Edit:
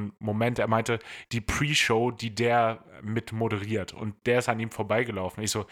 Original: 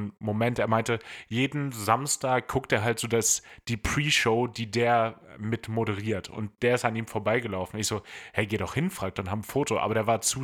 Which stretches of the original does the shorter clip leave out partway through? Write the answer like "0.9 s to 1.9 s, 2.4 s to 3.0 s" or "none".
1.2 s to 3.6 s